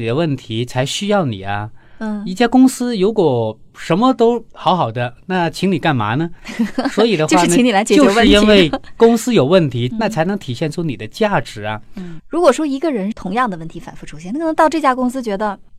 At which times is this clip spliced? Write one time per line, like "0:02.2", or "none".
0:09.9
0:12.2